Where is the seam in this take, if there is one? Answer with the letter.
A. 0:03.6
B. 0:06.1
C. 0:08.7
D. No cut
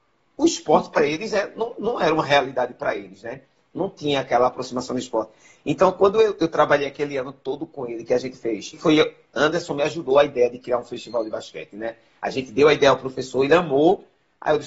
C